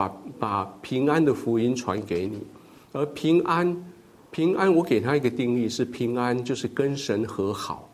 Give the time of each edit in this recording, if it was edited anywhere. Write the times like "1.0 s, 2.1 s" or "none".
none